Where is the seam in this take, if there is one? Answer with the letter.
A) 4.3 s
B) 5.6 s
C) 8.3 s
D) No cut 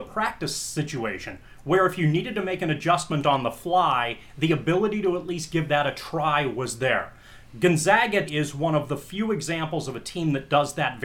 C